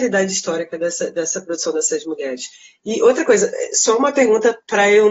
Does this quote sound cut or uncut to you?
uncut